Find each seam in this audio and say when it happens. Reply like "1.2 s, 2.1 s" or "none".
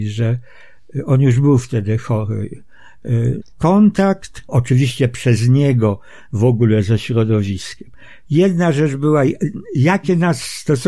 3.4 s, 4.5 s